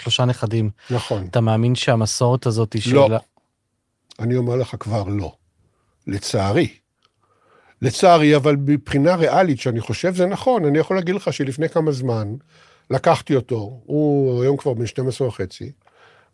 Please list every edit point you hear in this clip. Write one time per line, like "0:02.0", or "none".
none